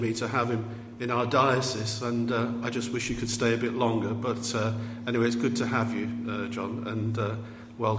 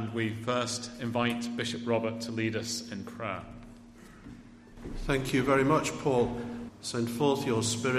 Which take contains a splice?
second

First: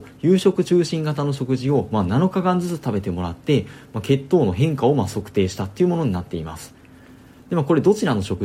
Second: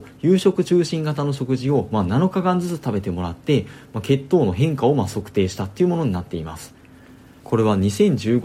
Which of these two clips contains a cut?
second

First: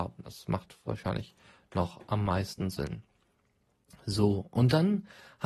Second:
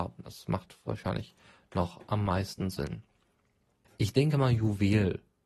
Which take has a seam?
second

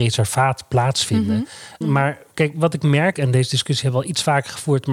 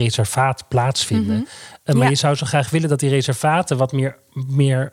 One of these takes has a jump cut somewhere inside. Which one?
first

